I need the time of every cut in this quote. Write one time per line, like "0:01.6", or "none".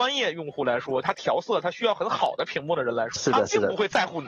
0:01.0
0:03.2